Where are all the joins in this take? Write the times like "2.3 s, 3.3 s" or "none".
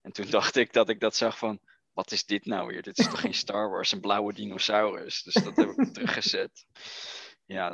none